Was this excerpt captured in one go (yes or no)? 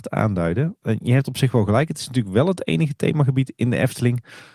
yes